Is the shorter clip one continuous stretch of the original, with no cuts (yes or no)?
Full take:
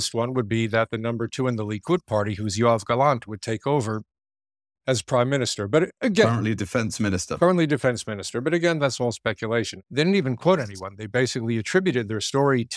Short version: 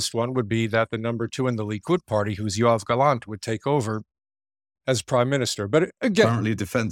yes